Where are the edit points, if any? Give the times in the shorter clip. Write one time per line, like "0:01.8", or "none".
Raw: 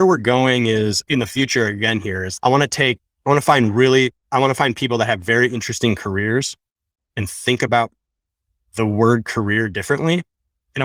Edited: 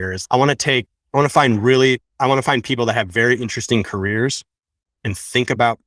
none